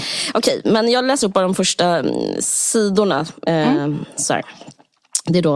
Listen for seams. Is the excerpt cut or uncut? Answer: uncut